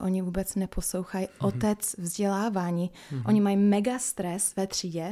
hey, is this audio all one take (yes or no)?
yes